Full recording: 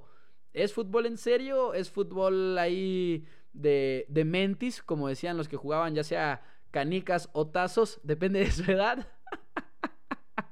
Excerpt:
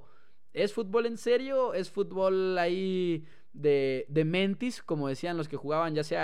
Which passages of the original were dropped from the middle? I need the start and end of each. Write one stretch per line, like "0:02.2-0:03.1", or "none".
none